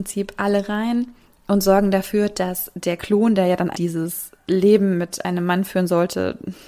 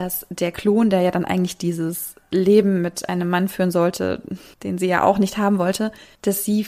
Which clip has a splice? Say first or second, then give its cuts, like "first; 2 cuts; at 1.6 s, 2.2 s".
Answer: first; 1 cut; at 3.7 s